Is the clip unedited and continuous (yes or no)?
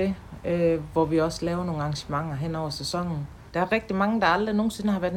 no